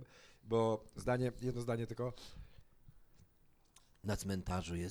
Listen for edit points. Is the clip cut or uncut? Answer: uncut